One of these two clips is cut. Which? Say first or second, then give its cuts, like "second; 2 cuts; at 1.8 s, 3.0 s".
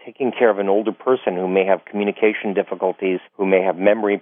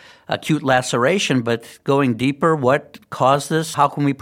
first; 1 cut; at 3.3 s